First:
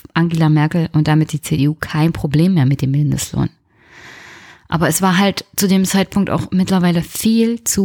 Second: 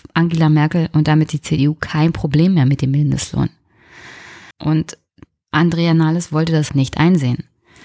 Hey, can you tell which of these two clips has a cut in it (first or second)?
second